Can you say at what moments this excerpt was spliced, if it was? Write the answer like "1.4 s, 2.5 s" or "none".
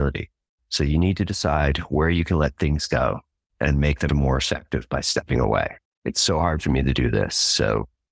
4.1 s